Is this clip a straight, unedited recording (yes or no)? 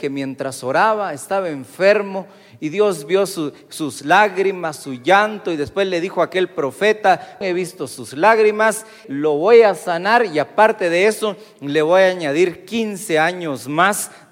no